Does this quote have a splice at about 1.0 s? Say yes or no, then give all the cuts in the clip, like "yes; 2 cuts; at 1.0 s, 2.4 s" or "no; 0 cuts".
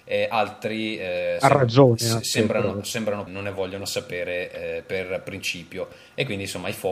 no; 1 cut; at 3.3 s